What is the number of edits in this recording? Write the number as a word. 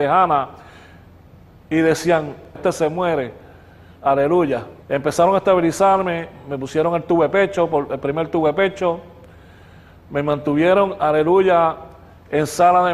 two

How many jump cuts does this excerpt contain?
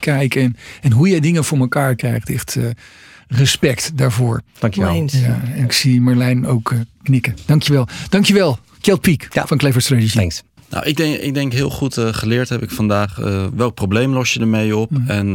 one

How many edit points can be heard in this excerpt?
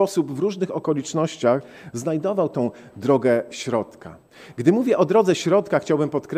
zero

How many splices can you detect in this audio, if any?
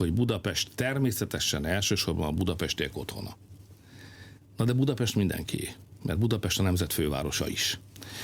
zero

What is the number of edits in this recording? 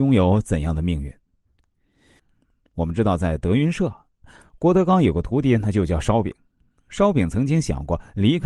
one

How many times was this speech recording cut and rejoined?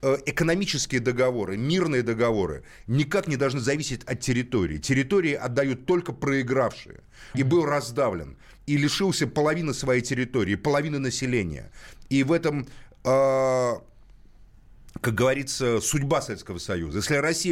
one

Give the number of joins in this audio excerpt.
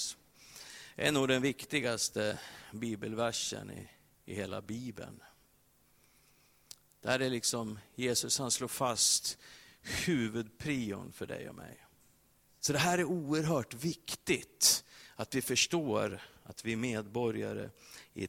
one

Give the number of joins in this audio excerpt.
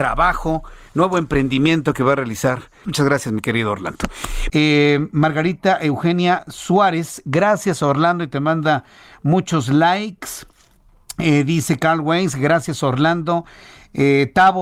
two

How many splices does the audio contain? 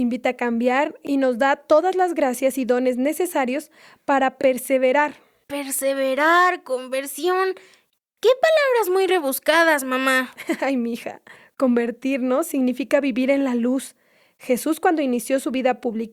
zero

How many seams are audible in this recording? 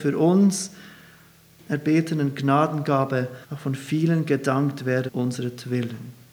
three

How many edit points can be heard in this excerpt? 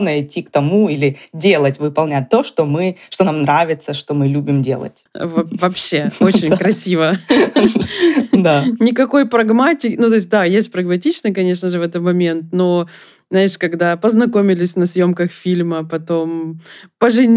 one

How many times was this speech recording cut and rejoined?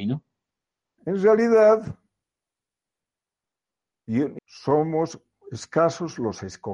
two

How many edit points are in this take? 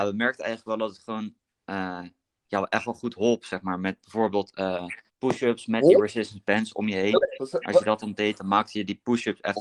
one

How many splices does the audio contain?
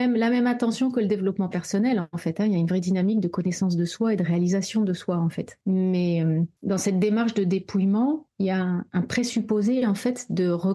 zero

